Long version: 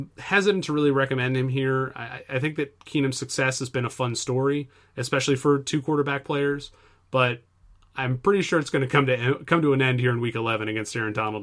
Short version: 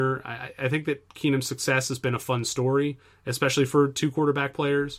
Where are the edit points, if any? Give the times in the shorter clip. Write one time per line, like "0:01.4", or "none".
none

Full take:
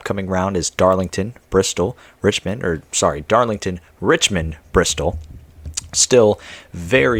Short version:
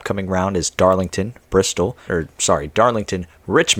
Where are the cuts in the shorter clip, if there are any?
0:02.1

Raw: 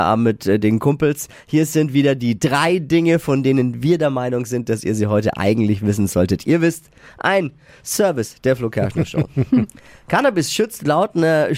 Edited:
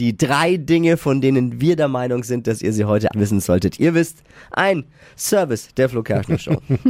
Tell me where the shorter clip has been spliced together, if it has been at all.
0:03.1

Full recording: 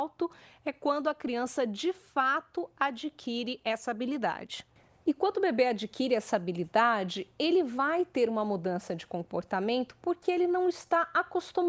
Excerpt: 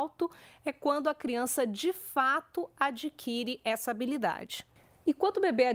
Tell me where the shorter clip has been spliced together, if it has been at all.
none

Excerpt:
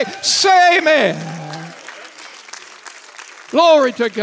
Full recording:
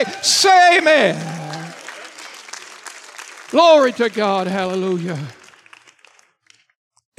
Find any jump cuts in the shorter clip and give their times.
none

